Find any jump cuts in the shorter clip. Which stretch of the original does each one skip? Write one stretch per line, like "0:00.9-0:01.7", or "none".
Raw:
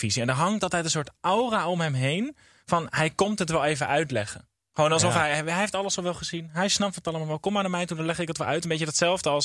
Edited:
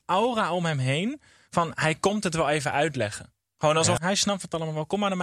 0:05.1-0:06.5

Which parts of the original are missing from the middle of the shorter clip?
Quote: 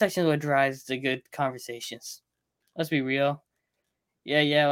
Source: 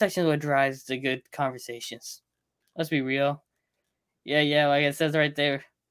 none

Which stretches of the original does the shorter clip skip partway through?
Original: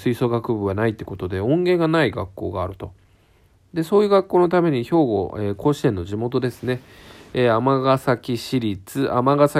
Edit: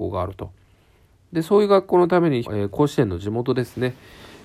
0:04.8-0:05.3

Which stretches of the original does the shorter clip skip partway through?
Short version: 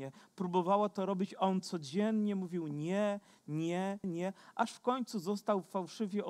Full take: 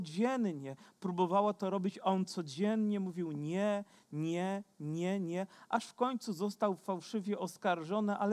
0:04.7-0:05.2

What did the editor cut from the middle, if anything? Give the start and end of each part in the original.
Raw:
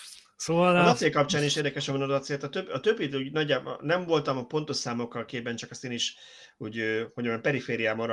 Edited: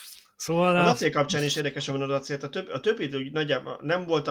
none

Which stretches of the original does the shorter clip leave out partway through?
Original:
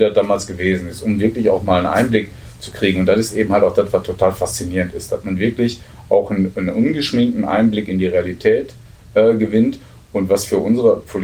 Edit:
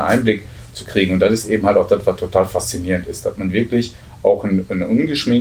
none

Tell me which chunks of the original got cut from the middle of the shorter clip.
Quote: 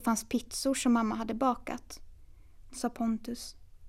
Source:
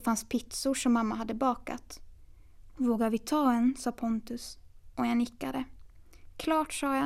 0:02.7-0:03.7

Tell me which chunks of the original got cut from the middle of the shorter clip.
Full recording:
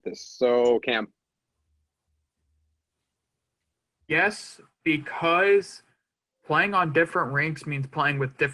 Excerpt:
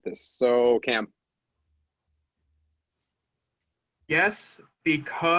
none

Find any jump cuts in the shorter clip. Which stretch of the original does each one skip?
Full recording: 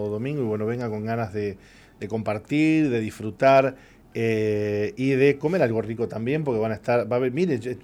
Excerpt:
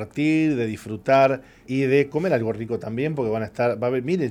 0:04.0-0:04.9

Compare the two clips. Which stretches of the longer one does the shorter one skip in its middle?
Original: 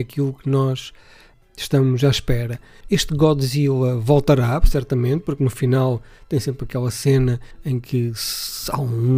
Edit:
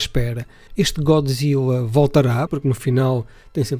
0:04.6-0:05.2

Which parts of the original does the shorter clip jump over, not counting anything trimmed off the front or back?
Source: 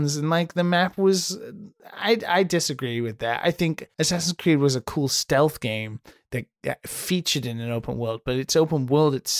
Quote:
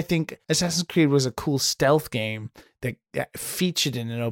none

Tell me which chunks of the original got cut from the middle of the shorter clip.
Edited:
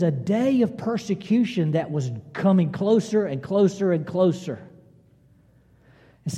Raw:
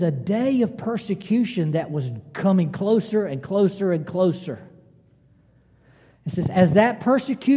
none

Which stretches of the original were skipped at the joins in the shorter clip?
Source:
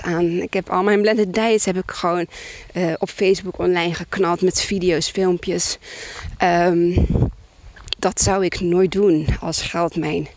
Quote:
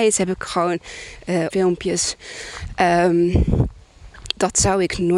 0:03.0-0:05.1

